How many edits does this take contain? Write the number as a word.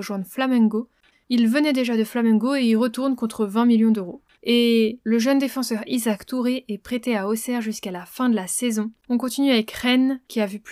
two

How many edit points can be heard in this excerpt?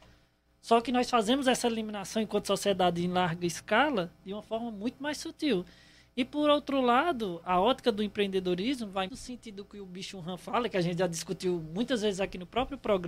one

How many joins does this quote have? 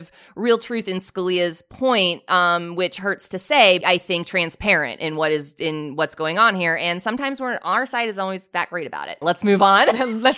two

